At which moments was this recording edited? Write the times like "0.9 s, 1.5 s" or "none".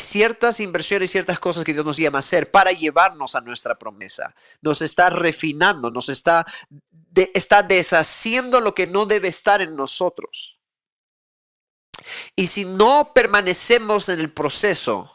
5.9 s